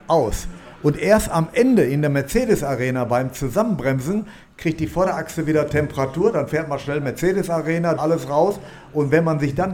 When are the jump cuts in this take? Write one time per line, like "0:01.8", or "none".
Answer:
0:08.0